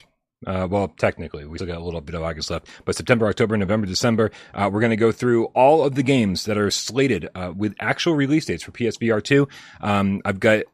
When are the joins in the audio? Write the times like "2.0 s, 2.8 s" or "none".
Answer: 1.6 s